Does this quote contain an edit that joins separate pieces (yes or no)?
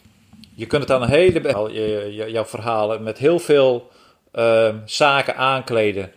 yes